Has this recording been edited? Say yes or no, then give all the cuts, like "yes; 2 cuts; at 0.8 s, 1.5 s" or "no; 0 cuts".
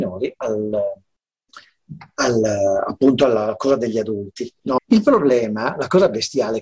yes; 1 cut; at 4.8 s